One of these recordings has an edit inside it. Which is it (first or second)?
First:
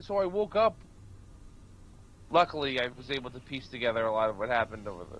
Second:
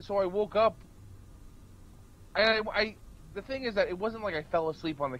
first